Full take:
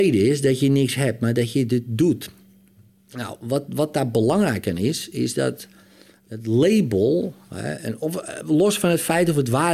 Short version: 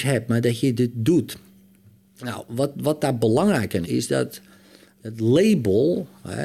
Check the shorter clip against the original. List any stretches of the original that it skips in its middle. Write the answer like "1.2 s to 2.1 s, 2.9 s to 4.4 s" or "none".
4.8 s to 5.1 s